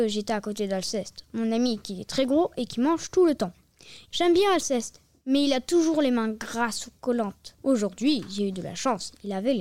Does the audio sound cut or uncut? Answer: cut